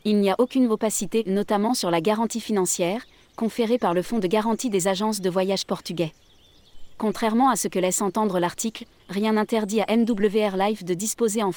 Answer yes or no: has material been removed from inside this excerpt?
yes